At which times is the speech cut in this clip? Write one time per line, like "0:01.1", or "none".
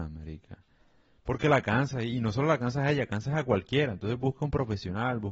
none